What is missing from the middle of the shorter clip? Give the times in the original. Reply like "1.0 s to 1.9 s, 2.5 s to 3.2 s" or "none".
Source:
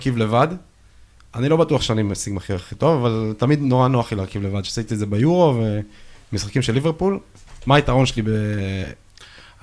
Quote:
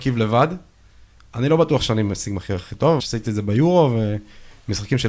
3.0 s to 4.6 s

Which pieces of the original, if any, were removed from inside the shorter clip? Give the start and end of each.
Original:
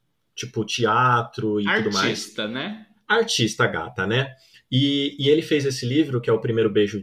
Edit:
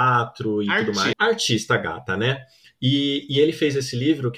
2.1 s to 3.0 s

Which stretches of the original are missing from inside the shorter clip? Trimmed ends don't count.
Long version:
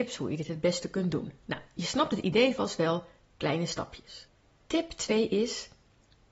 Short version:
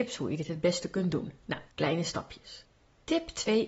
1.7 s to 3.3 s

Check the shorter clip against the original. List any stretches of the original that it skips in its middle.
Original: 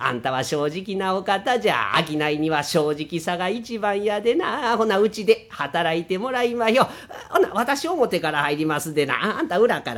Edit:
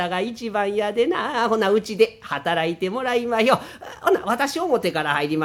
none

